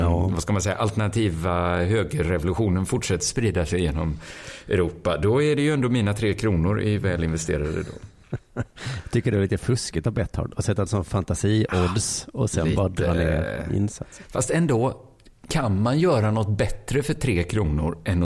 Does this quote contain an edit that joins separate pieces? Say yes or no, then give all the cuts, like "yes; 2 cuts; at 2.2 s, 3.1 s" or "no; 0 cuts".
no; 0 cuts